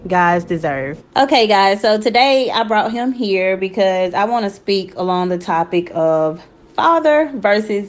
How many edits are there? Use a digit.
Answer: 1